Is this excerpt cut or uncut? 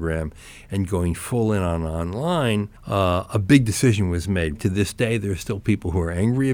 cut